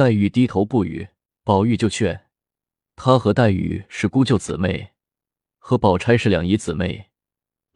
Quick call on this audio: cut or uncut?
cut